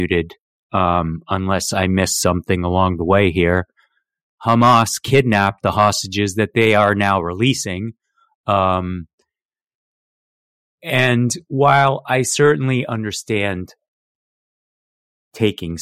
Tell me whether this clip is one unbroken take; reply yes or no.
yes